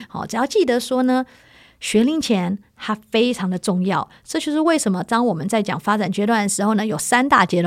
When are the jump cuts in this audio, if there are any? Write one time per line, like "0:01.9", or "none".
none